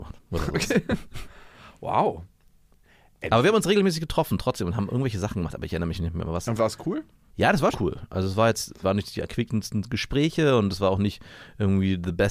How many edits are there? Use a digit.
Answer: 2